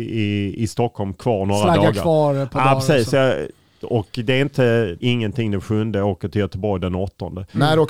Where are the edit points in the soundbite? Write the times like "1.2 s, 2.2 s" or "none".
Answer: 5.0 s